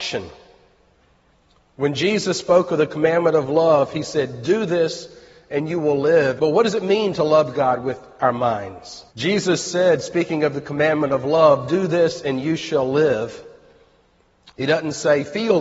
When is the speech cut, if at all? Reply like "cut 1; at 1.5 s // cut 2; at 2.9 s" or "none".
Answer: cut 1; at 6.4 s // cut 2; at 9.1 s

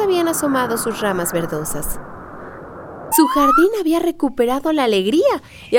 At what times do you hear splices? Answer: cut 1; at 3.1 s

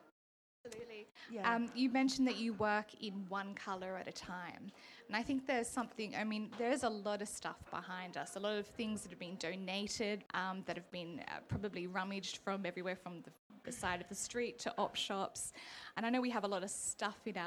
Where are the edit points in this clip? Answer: cut 1; at 10.3 s

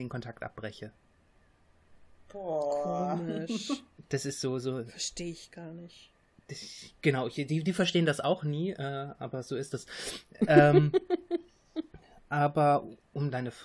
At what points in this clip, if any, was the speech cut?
none

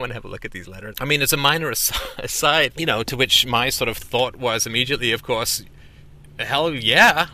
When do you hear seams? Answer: cut 1; at 0.9 s // cut 2; at 2.7 s

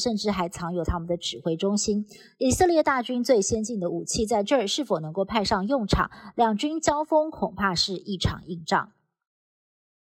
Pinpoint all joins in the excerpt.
none

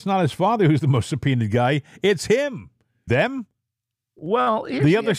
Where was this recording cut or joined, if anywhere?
cut 1; at 3.1 s

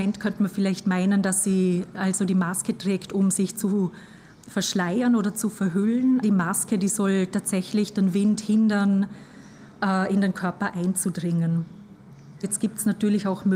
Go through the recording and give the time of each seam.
cut 1; at 6.2 s // cut 2; at 12.4 s

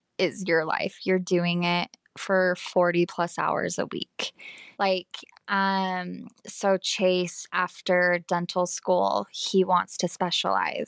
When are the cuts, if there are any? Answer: cut 1; at 4.7 s

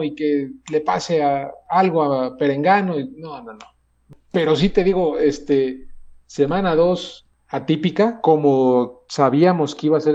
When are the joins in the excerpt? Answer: none

